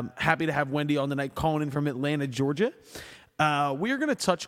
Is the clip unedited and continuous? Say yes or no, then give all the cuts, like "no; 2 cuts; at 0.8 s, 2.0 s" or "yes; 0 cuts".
yes; 0 cuts